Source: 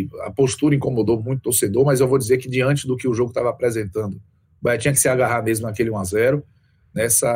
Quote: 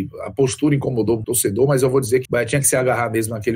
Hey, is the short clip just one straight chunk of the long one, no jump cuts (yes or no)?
no